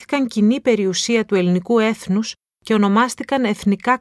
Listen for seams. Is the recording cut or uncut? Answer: uncut